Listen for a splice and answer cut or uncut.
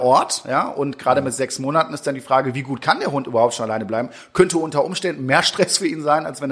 uncut